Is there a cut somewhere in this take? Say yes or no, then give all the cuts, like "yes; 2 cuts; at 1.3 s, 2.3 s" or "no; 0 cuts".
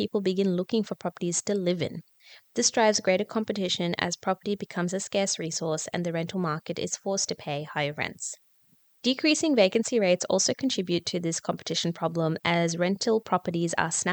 no; 0 cuts